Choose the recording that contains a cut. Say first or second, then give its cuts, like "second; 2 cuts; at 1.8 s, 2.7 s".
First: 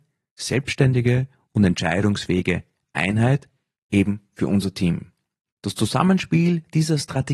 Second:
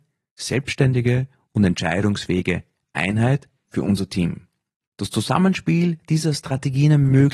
second; 1 cut; at 3.6 s